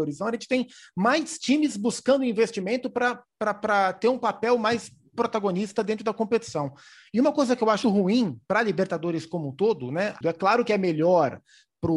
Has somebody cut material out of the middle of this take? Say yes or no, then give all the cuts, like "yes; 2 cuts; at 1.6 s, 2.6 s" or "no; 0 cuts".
yes; 2 cuts; at 7.8 s, 10.2 s